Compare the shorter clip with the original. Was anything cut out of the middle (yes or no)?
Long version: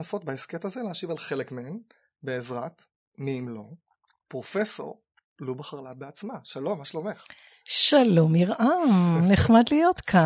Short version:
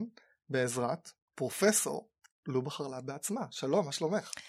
yes